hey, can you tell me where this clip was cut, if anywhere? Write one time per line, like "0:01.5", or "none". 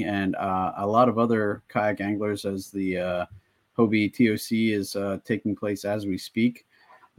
none

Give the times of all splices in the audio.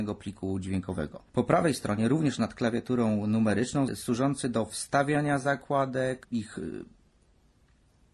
0:01.3
0:03.9
0:06.2

